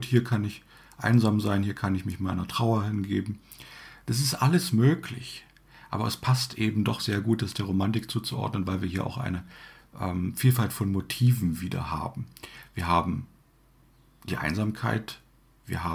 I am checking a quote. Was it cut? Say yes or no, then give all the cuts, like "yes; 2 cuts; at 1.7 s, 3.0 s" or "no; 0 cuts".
no; 0 cuts